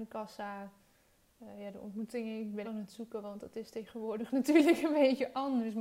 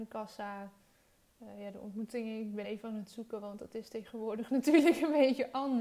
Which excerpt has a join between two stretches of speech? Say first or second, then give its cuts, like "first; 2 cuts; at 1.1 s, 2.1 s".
first; 1 cut; at 2.6 s